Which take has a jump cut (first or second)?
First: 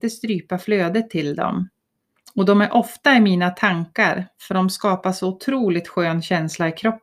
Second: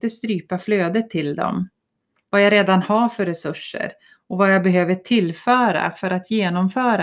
second